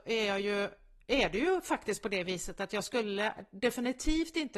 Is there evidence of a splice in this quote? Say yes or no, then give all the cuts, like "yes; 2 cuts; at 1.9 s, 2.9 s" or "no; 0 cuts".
no; 0 cuts